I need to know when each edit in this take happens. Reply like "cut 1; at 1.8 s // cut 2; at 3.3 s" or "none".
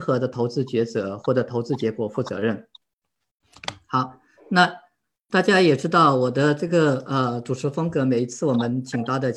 none